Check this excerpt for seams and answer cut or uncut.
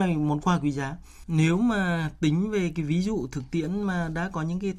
cut